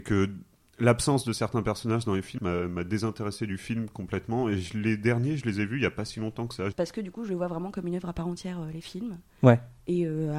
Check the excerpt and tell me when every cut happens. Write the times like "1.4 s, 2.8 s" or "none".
2.4 s, 6.7 s